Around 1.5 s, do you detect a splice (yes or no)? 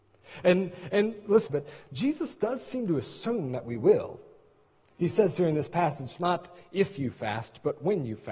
yes